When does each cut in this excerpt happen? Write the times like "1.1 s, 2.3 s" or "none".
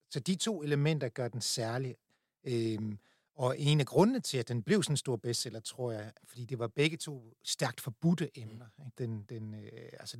6.2 s, 8.9 s